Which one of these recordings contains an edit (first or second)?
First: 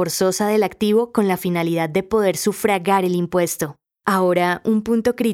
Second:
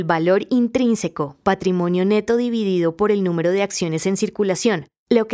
first